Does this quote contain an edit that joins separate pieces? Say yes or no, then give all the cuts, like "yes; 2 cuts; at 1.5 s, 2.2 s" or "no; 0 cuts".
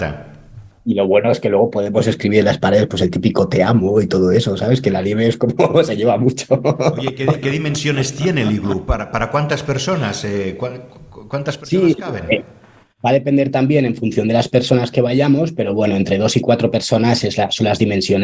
no; 0 cuts